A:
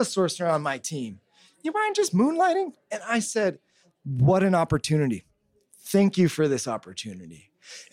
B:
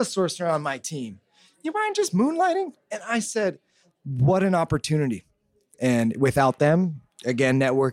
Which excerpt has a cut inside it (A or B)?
B